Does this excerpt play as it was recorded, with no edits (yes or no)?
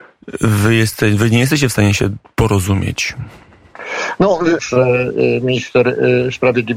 no